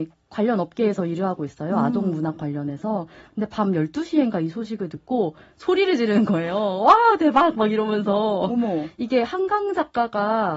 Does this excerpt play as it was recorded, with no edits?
yes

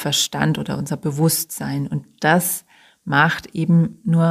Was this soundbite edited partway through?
no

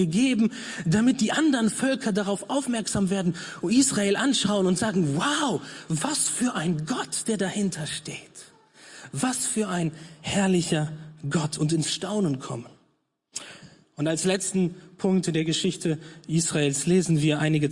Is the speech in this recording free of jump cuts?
yes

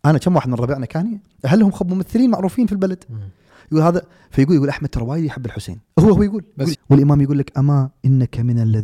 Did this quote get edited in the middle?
yes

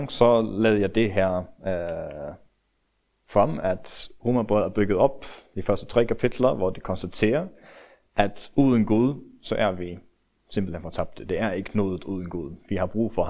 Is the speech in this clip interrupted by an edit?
no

